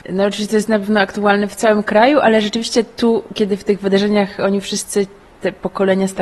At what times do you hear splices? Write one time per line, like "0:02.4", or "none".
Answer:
none